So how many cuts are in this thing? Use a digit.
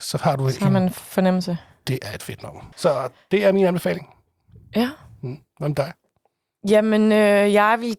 1